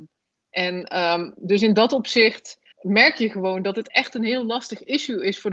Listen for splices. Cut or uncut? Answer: cut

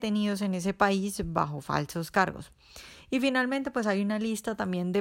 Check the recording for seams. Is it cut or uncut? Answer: uncut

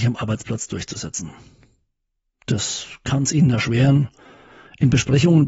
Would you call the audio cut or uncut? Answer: uncut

